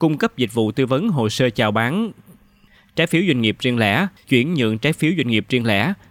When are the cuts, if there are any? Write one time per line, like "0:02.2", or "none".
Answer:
0:04.2